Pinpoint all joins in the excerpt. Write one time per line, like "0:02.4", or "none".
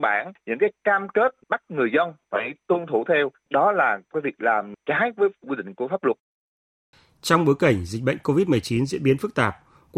none